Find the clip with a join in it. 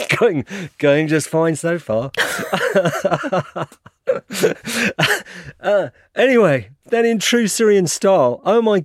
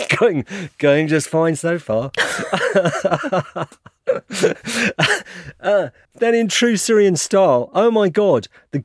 second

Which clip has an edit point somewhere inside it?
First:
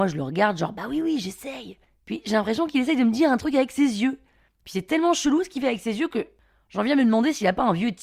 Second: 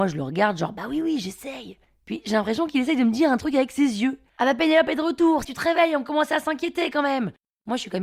second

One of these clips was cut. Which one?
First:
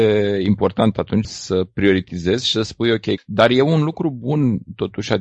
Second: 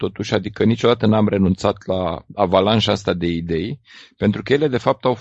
first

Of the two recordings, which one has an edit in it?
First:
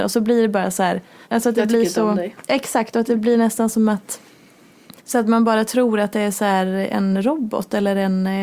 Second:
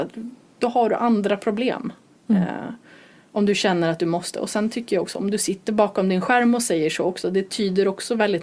first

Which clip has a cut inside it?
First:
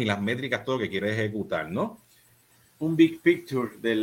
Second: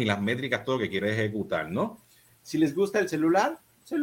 second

